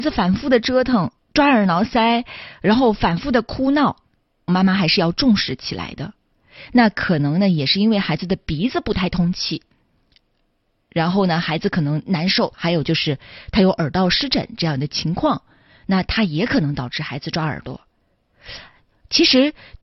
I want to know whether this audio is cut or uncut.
cut